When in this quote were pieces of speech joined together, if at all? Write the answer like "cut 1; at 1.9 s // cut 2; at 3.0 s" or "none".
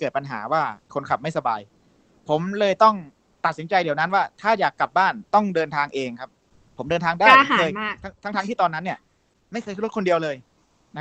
none

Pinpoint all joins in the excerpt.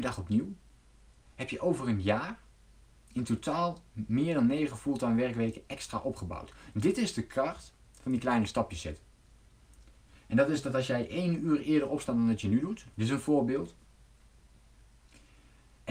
cut 1; at 10.2 s // cut 2; at 12.9 s

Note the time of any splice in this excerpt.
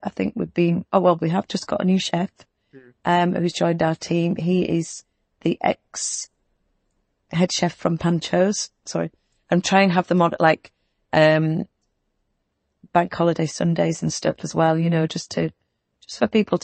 cut 1; at 8.8 s

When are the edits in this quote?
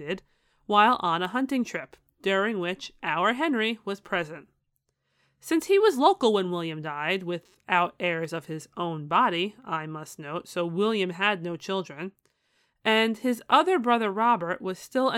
none

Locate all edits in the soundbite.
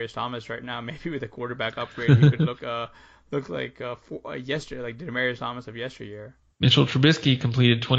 cut 1; at 2.6 s // cut 2; at 6.5 s

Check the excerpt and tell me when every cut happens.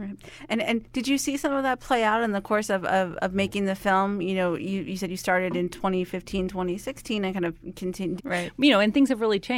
cut 1; at 8.2 s

